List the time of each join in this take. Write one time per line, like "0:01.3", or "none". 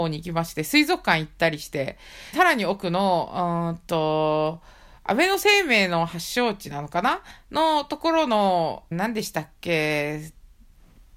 0:02.3
0:08.9